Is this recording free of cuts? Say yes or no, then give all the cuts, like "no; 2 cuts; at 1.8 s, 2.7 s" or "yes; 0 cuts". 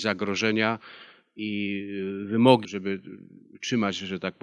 no; 2 cuts; at 1.4 s, 2.6 s